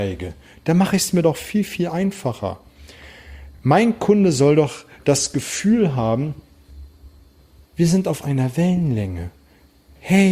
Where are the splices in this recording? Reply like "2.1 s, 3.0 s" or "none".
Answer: none